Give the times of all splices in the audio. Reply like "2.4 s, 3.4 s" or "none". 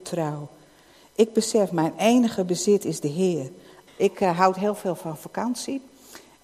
3.9 s